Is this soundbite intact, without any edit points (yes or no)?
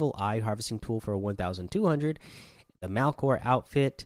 yes